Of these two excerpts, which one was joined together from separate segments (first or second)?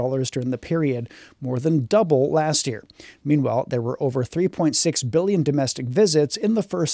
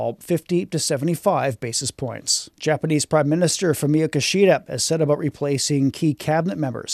second